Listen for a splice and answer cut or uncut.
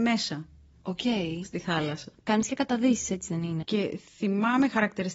cut